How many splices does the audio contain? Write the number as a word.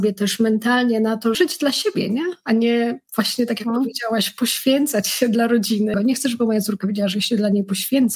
two